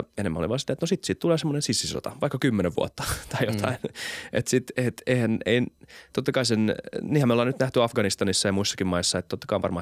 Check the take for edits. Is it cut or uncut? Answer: uncut